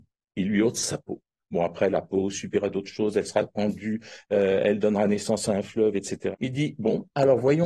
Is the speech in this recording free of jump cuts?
no; 1 cut; at 6.3 s

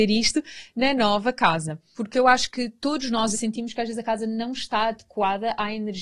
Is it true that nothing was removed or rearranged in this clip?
no; 2 cuts; at 1.9 s, 3.3 s

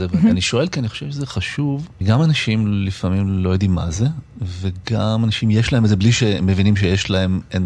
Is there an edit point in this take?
no; 0 cuts

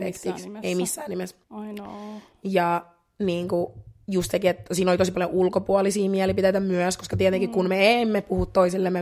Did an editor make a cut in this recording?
yes; 1 cut; at 1.4 s

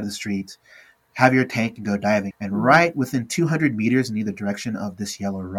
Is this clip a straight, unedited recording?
no; 1 cut; at 2.3 s

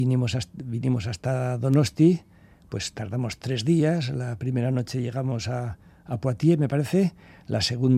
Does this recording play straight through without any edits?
yes; 0 cuts

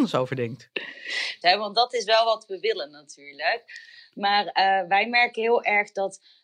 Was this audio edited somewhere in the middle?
yes; 1 cut; at 1.4 s

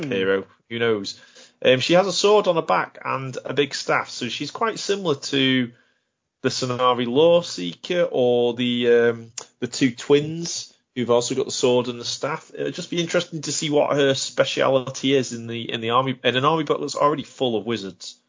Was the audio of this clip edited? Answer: no; 0 cuts

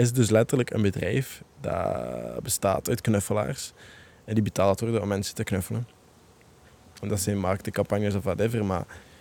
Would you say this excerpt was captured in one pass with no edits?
yes; 0 cuts

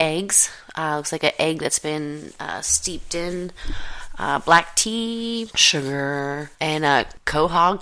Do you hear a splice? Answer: yes; 2 cuts; at 5.5 s, 6.5 s

